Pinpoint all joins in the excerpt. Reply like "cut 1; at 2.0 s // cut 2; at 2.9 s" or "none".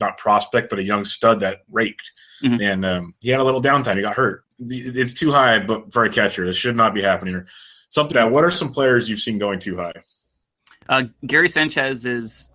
cut 1; at 4.4 s // cut 2; at 8.1 s